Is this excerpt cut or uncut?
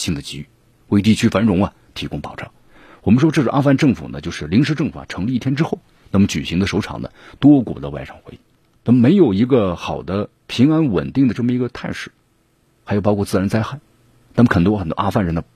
cut